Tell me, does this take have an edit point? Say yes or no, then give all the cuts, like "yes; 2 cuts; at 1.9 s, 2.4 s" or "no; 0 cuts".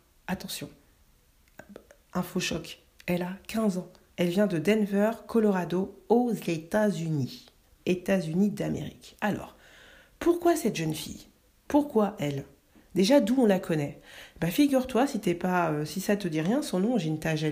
yes; 1 cut; at 4.1 s